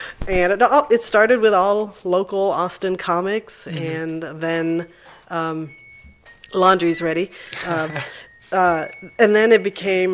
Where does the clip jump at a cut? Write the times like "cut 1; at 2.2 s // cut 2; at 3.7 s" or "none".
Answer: none